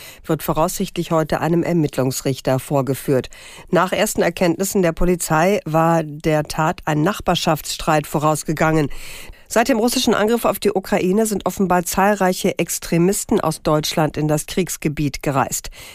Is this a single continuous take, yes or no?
no